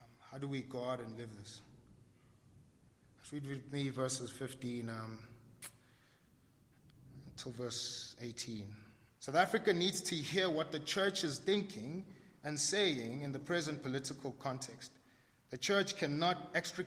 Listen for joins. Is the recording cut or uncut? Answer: cut